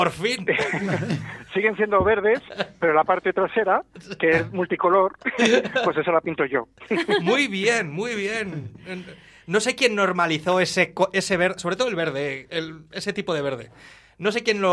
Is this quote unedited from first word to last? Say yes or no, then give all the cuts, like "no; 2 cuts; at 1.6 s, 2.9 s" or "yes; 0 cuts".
yes; 0 cuts